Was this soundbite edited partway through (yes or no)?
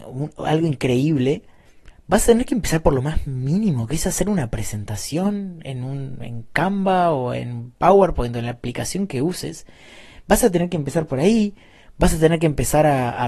no